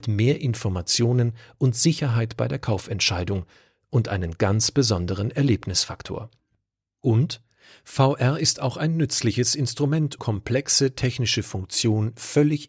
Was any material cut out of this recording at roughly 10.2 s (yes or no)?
yes